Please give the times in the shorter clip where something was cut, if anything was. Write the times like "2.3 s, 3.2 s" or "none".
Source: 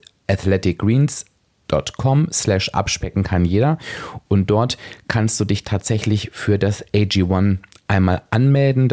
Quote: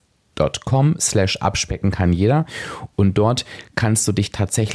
none